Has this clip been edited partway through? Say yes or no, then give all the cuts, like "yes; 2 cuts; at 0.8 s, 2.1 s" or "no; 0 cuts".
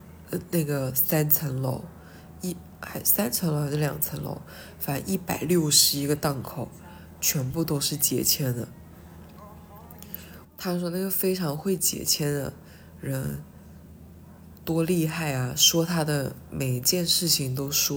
yes; 1 cut; at 10.4 s